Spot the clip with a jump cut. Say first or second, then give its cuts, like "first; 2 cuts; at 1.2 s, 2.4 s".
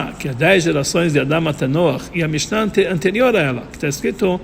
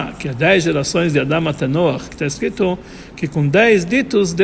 second; 1 cut; at 2.1 s